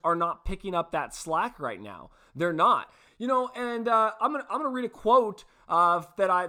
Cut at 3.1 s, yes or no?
yes